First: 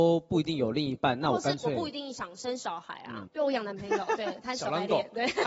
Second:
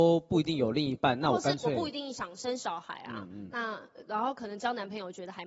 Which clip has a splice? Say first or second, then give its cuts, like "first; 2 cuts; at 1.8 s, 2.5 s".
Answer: first; 1 cut; at 3.3 s